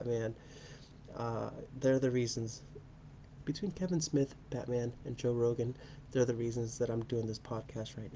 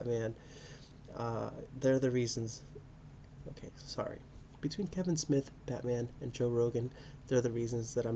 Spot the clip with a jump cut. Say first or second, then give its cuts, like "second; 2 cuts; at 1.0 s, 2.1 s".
first; 2 cuts; at 3.4 s, 7.1 s